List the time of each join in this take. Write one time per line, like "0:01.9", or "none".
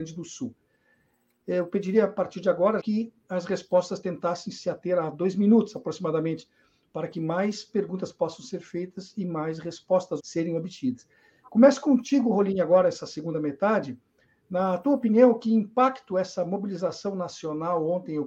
0:02.8
0:10.2